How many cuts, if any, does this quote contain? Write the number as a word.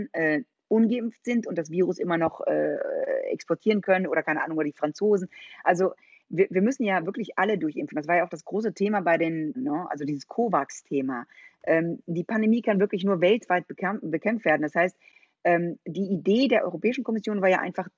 one